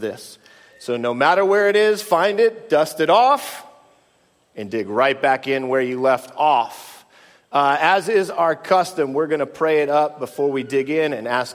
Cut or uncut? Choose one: uncut